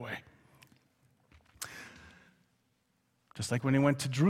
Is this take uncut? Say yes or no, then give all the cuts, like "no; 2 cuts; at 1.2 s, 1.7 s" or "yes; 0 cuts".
no; 1 cut; at 3.3 s